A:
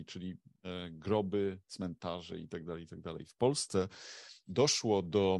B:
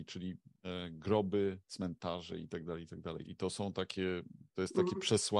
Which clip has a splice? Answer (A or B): B